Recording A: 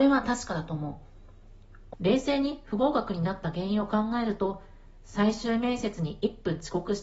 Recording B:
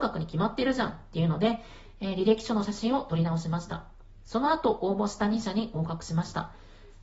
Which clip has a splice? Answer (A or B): A